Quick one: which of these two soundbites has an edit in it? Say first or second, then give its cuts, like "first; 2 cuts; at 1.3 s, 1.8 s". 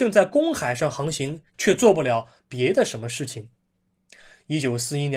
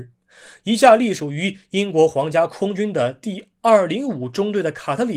first; 1 cut; at 1.5 s